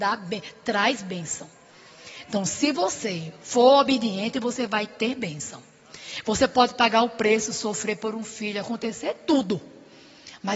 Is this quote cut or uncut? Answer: uncut